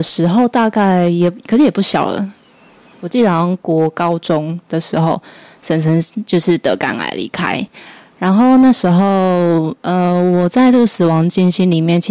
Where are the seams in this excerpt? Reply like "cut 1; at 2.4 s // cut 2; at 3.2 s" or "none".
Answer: none